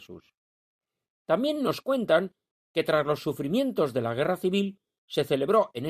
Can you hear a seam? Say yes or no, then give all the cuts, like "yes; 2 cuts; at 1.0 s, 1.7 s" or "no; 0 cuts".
no; 0 cuts